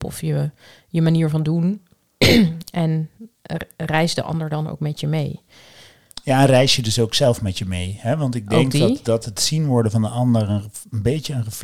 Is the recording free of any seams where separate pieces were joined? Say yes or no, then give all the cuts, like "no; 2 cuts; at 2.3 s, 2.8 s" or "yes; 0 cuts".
yes; 0 cuts